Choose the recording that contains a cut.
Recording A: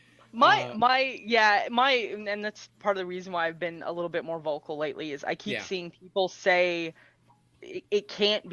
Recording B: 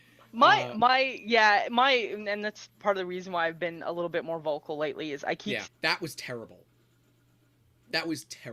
B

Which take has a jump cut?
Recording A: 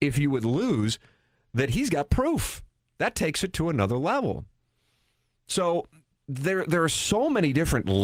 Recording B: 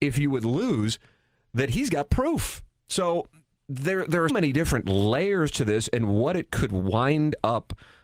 B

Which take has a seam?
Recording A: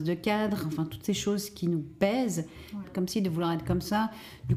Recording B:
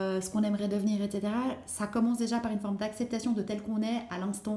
A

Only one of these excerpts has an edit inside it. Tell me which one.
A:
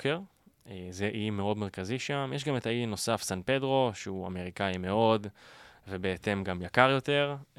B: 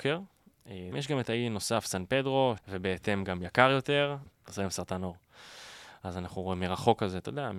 B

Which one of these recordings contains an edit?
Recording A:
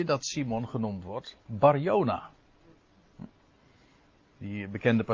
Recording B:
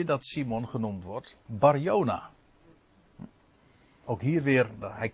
B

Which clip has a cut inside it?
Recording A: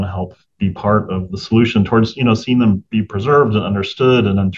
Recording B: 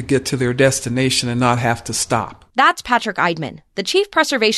B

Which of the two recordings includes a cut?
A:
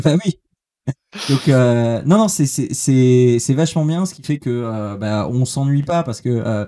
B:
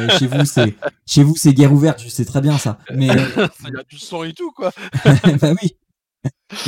B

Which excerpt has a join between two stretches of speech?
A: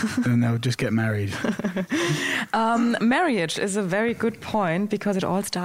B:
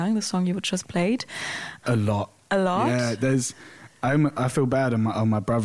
B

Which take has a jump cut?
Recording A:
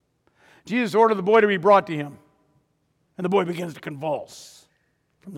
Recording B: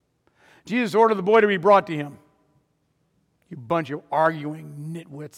A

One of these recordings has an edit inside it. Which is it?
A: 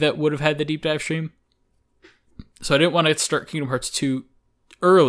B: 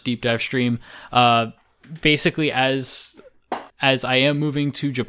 B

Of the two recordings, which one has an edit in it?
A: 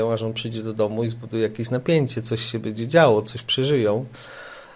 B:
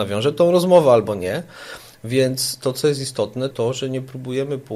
B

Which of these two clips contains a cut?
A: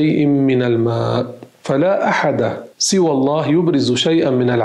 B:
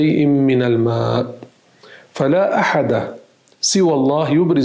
A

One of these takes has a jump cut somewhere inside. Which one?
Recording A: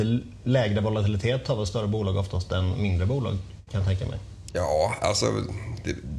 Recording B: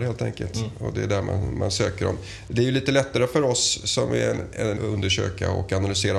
B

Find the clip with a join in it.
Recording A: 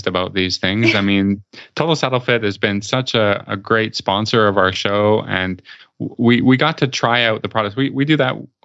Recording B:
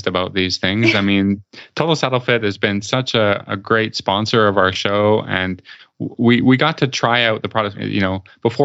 B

